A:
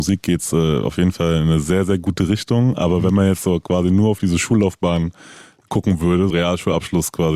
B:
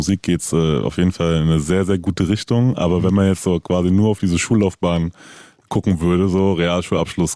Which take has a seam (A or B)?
A